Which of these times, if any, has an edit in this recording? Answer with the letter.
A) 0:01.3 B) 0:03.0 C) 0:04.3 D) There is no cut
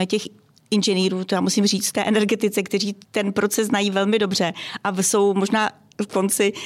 B